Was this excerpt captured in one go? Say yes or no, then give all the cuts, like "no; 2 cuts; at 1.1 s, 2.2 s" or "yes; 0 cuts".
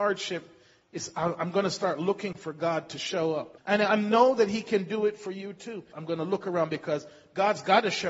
no; 2 cuts; at 3.6 s, 5.9 s